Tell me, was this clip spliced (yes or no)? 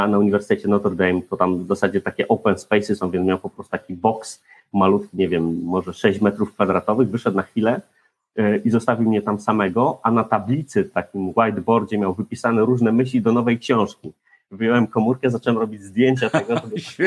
no